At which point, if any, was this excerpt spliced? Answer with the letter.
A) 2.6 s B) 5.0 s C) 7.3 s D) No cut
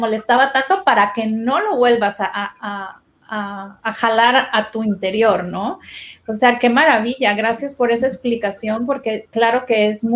D